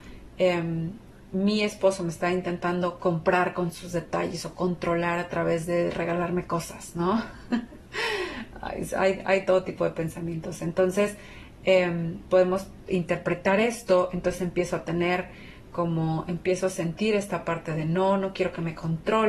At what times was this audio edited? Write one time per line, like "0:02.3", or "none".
none